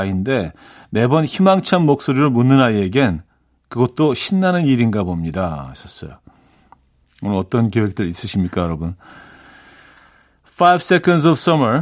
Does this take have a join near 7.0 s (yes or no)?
yes